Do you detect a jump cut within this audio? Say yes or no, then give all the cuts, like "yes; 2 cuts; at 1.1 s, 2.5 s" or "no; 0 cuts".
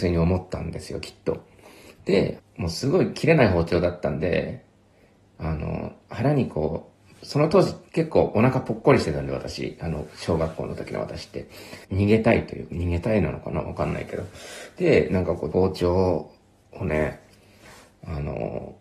yes; 3 cuts; at 2.4 s, 11.8 s, 15.5 s